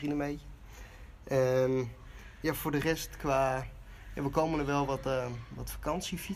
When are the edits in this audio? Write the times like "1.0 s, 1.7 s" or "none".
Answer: none